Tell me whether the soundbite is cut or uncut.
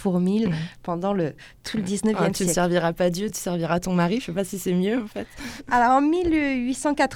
uncut